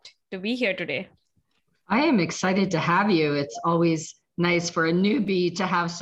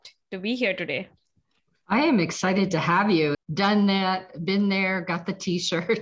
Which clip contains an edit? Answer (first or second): second